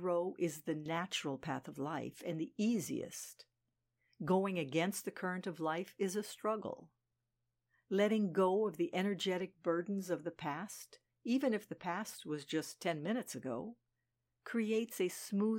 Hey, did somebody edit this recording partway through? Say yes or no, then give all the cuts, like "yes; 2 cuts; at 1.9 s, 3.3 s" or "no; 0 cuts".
no; 0 cuts